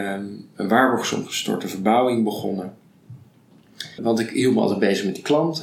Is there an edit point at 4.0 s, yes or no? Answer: yes